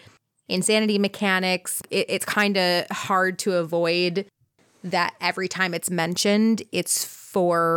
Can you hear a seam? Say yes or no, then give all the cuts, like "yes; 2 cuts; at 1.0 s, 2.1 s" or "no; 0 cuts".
yes; 1 cut; at 1.8 s